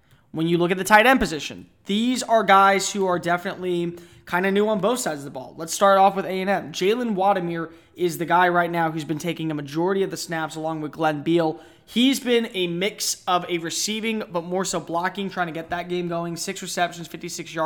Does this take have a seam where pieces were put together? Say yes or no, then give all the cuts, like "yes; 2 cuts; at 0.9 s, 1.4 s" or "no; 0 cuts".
no; 0 cuts